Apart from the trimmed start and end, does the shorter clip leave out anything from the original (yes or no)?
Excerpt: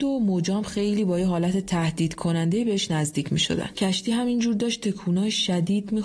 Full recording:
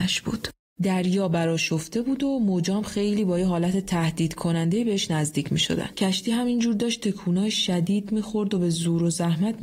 no